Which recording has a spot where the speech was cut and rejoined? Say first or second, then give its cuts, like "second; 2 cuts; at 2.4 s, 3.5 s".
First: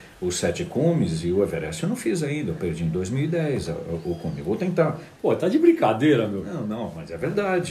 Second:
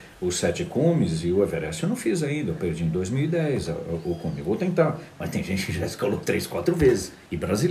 first; 1 cut; at 5.2 s